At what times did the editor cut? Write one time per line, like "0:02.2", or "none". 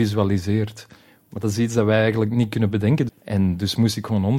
0:03.1